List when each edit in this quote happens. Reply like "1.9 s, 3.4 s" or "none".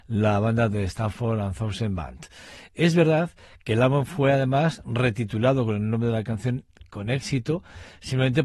none